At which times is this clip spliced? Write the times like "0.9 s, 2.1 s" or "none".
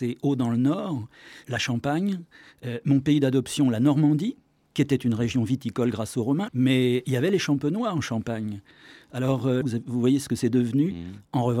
1.4 s, 6.5 s, 9.6 s